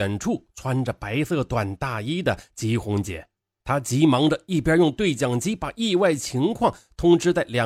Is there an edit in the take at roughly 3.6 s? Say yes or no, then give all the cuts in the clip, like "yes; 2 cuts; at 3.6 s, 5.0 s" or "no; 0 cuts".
yes; 1 cut; at 3.6 s